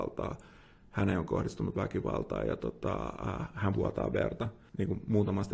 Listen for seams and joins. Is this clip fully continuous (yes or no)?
yes